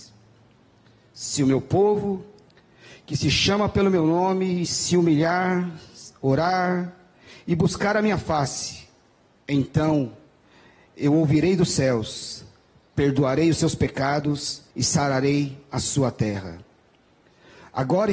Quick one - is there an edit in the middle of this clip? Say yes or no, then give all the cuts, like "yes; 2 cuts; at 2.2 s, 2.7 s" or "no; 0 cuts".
yes; 2 cuts; at 9.4 s, 14.7 s